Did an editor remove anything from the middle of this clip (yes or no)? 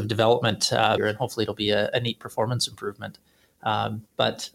yes